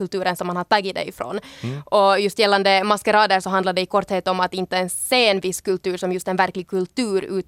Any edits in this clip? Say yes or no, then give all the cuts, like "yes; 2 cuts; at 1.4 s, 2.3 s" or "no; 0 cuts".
no; 0 cuts